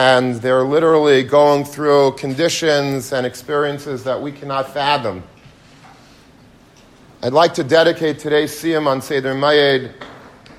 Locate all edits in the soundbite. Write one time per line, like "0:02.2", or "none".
none